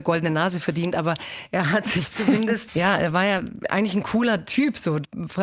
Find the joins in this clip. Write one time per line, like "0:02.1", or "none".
0:02.7